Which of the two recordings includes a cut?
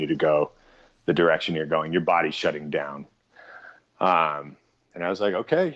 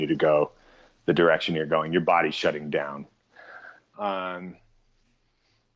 second; 1 cut; at 3.9 s

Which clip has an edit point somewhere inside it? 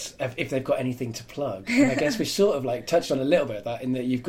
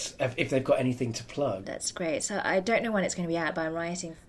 second; 1 cut; at 1.6 s

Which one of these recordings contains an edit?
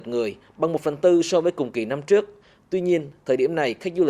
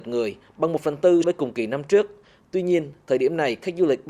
second; 1 cut; at 1.2 s

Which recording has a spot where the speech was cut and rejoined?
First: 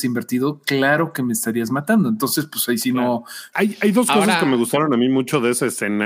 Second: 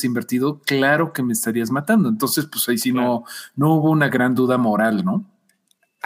first; 1 cut; at 3.5 s

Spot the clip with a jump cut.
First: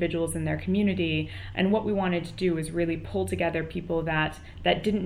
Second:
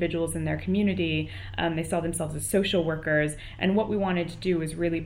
first; 1 cut; at 1.5 s

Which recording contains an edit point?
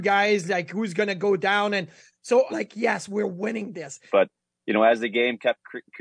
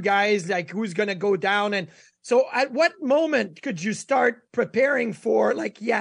first; 2 cuts; at 2.5 s, 4.1 s

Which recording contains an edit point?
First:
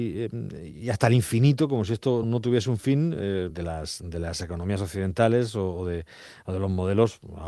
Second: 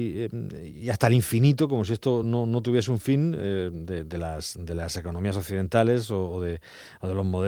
first; 2 cuts; at 2.2 s, 3.5 s

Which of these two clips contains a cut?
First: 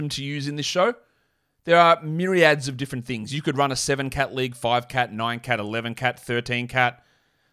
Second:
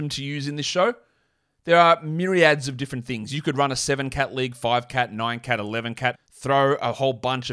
second; 1 cut; at 6.1 s

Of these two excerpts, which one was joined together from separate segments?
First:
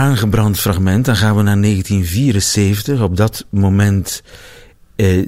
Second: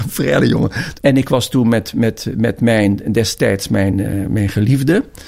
second; 1 cut; at 1.0 s

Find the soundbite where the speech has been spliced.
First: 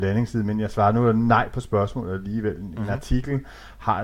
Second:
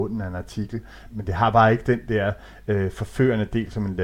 second; 1 cut; at 1.1 s

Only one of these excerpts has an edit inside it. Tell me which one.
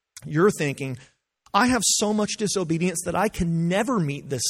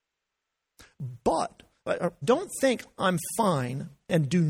second; 1 cut; at 2.2 s

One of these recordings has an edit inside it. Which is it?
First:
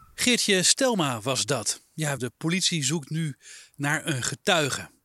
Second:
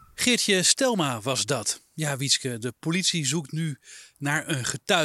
first; 1 cut; at 2.2 s

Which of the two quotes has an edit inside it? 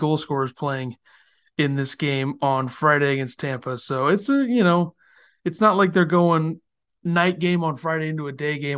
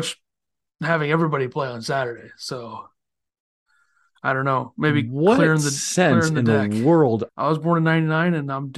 second; 1 cut; at 7.3 s

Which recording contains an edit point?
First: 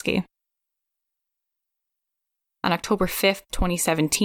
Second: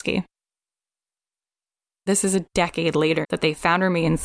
second; 2 cuts; at 2.1 s, 3.2 s

